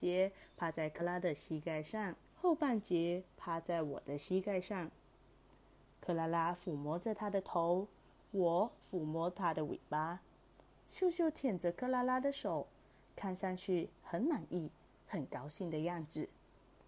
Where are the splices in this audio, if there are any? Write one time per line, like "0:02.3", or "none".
0:01.0
0:02.3